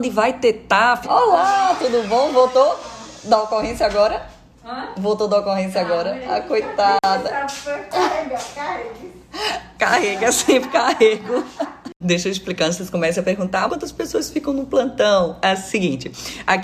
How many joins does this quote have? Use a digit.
3